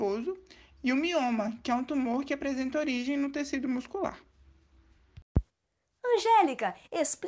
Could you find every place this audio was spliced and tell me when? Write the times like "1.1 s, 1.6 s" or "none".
6.0 s